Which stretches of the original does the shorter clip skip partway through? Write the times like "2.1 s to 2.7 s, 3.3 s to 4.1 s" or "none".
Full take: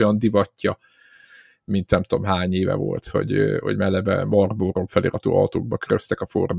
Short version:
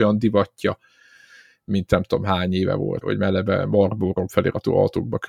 3.0 s to 3.6 s